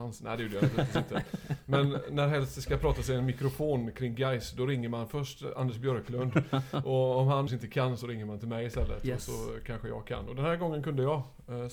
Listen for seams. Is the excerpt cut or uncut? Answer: cut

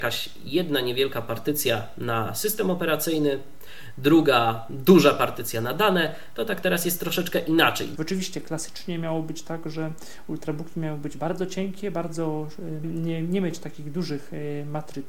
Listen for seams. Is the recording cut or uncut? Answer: cut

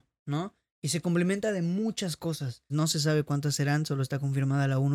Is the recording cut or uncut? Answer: cut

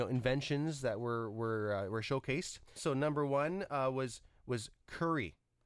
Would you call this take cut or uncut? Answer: cut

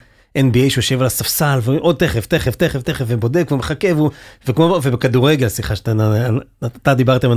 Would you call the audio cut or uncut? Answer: cut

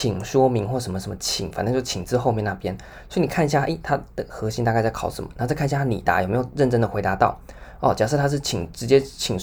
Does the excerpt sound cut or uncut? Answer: uncut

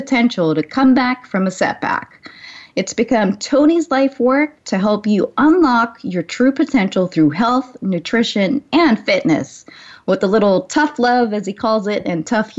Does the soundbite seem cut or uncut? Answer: uncut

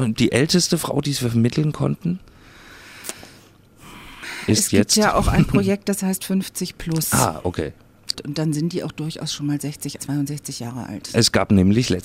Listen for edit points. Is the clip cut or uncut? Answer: cut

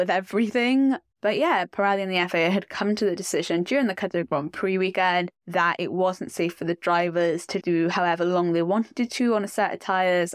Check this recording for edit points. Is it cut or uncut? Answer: cut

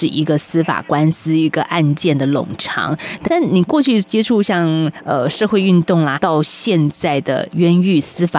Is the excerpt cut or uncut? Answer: cut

